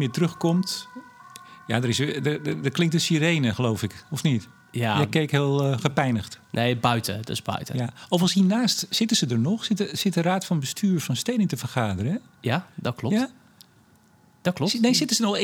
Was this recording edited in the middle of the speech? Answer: no; 0 cuts

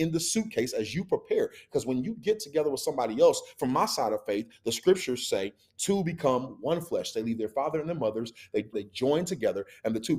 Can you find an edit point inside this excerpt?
yes; 1 cut; at 8.7 s

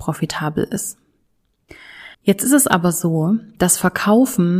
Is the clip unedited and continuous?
no; 1 cut; at 2.1 s

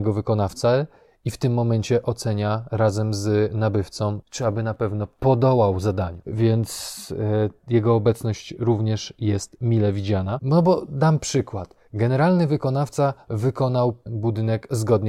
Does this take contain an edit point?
no; 0 cuts

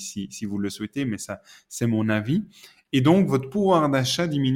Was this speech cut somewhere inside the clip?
no; 0 cuts

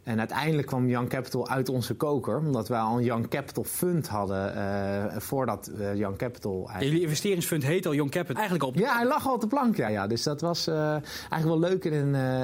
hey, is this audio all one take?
no; 2 cuts; at 8.3 s, 9.9 s

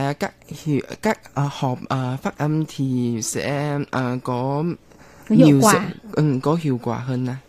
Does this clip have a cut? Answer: no; 0 cuts

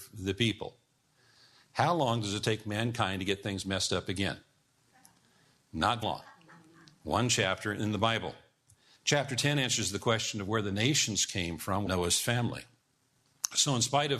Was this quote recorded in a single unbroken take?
no; 3 cuts; at 6.0 s, 8.9 s, 11.9 s

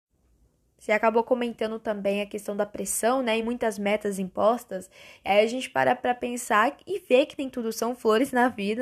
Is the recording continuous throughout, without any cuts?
yes; 0 cuts

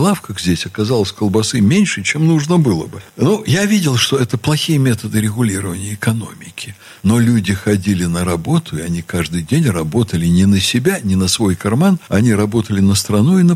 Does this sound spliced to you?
no; 0 cuts

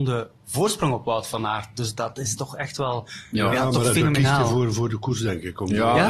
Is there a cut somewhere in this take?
no; 0 cuts

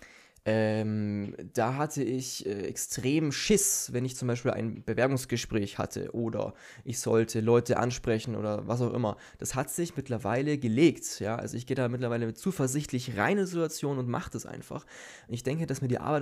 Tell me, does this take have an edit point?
no; 0 cuts

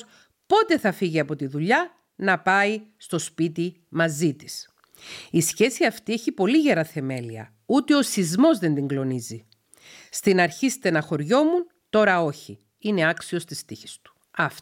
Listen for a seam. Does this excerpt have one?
no; 0 cuts

